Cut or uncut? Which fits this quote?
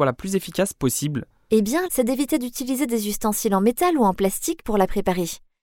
cut